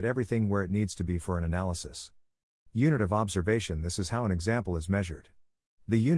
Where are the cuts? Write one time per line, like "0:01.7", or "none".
0:02.7